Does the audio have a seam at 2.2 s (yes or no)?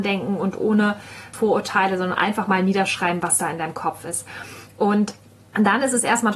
no